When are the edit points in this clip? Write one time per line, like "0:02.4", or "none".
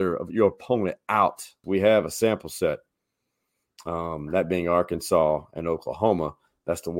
0:01.6